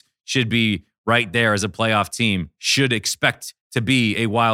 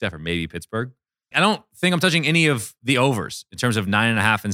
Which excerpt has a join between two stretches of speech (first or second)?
second